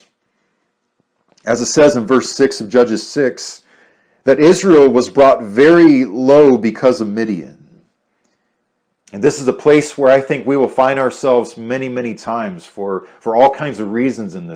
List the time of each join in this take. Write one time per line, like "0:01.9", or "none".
0:09.1